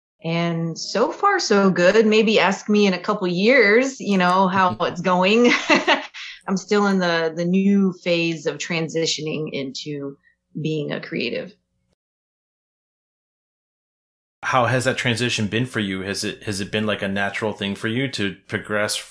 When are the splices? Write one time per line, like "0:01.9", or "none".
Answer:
none

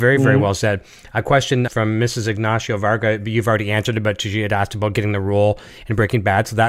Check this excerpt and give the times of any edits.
0:01.7

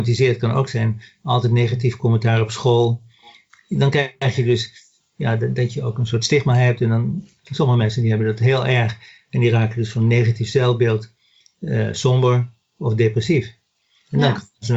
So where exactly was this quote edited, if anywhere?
0:03.5

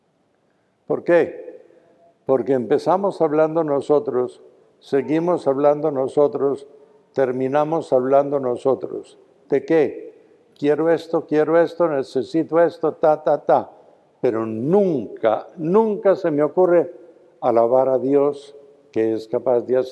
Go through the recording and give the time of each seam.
none

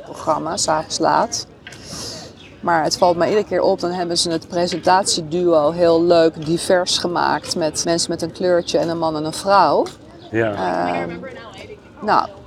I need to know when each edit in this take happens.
0:07.8
0:10.3

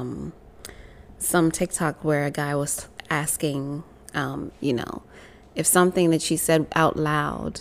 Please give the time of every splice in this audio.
0:04.5

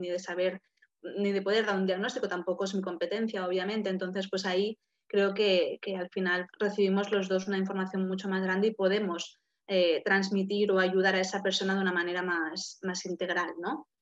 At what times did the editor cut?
0:06.5

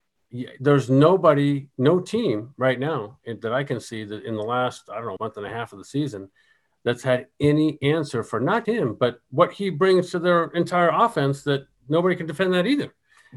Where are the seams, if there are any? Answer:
0:05.2
0:08.6

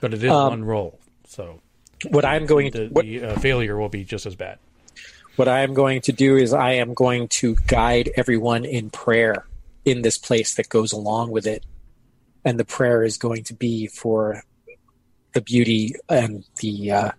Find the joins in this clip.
none

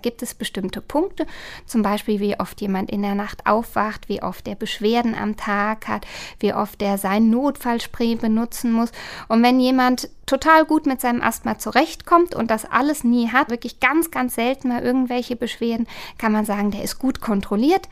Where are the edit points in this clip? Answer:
0:13.5

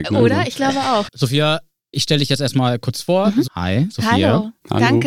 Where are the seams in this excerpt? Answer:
0:01.1
0:03.4

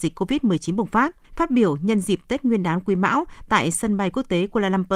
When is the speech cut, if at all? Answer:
0:01.2

